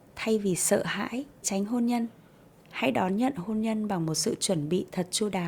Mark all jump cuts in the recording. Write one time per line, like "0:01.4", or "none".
0:01.4